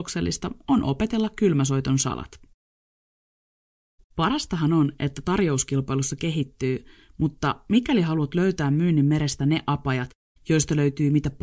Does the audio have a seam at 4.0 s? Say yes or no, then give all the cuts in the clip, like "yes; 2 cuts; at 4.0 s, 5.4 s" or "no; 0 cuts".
yes; 1 cut; at 4.0 s